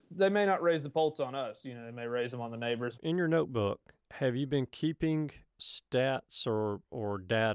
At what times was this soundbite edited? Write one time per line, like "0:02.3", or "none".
0:03.0